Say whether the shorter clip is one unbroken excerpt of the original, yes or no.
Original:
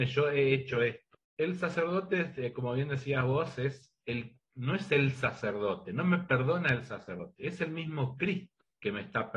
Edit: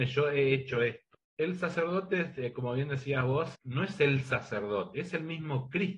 no